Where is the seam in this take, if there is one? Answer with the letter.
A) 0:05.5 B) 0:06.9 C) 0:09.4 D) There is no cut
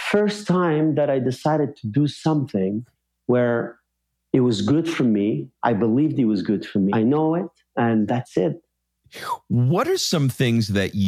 B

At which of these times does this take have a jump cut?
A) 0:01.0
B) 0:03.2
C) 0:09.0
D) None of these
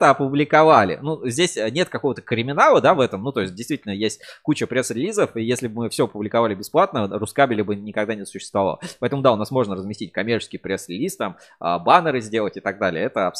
D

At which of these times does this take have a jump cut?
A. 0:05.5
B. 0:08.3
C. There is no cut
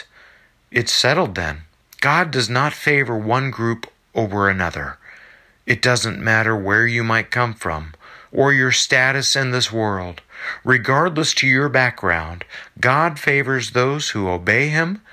B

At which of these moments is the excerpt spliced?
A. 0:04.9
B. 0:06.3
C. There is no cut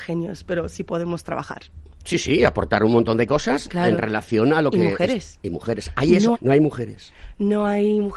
B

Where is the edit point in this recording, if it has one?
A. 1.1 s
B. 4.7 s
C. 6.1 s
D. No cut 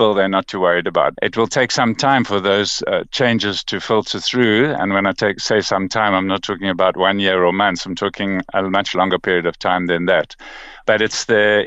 A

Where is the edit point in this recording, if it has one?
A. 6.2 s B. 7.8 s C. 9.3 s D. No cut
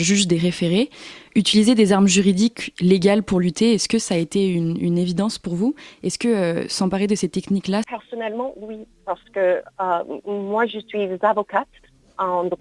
B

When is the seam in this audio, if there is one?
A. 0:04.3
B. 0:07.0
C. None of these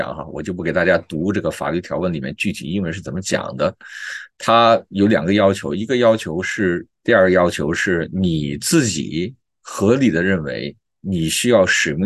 B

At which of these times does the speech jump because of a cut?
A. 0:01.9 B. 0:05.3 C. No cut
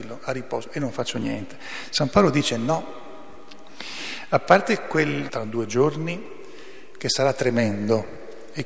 B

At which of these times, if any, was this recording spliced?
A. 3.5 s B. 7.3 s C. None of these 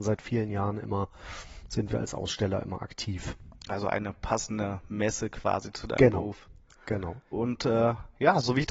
B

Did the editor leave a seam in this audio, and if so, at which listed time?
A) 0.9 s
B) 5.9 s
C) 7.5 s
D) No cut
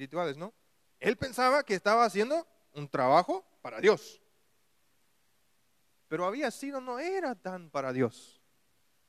A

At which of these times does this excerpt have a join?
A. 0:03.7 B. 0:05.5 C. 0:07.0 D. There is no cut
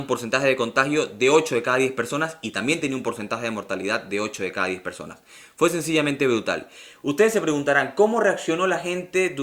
D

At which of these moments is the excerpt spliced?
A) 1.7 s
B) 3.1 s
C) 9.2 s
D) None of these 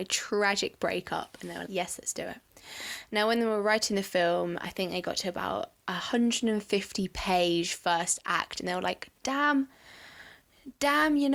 A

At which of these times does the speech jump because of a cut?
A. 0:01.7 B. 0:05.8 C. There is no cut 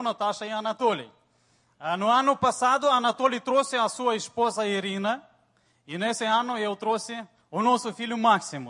C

